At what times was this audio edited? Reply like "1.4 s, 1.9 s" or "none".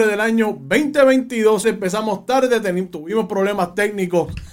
1.6 s